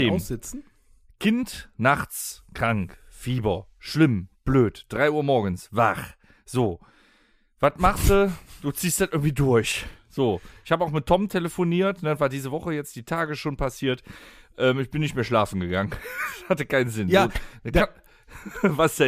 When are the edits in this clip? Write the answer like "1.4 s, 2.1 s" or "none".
none